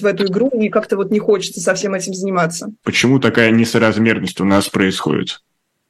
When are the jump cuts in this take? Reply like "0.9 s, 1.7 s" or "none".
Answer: 2.8 s